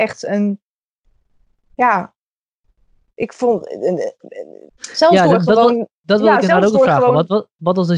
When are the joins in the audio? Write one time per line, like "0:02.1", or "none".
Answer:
0:04.7

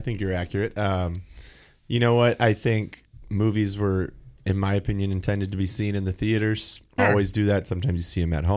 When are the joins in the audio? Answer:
0:07.0

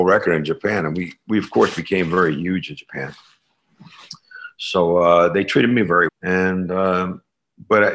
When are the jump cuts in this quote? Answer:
0:06.1

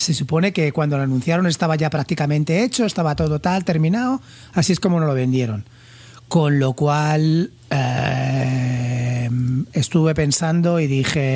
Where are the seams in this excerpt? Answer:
none

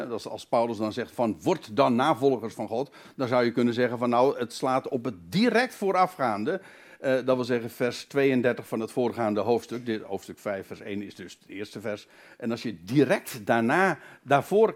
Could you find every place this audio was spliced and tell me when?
none

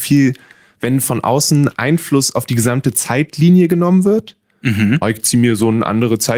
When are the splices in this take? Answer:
0:05.0

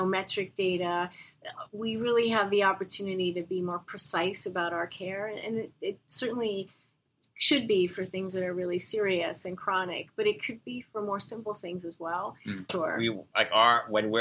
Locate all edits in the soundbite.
0:12.7

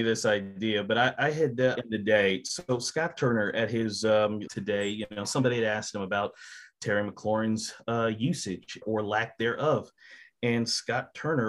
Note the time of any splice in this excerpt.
0:01.7
0:04.5
0:08.8

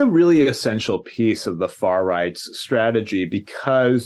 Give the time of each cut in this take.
none

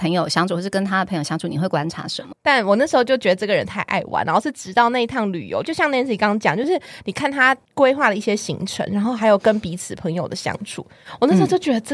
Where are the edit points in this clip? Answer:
0:02.3

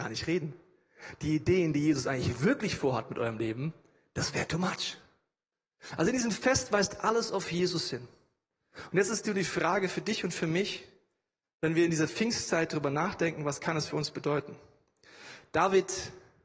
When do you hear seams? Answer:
none

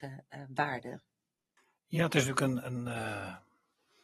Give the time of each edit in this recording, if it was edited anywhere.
none

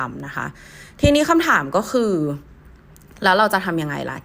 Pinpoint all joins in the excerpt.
none

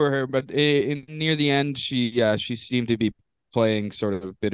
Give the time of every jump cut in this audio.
none

